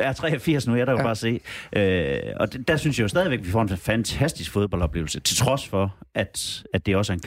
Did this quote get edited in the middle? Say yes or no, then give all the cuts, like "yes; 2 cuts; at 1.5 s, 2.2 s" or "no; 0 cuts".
no; 0 cuts